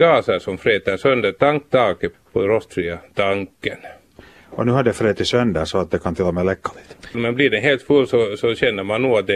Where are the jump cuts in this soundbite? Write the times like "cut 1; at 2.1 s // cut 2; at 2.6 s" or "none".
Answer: cut 1; at 2.1 s // cut 2; at 7.1 s